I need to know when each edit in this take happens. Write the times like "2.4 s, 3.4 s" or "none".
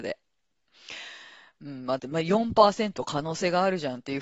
2.0 s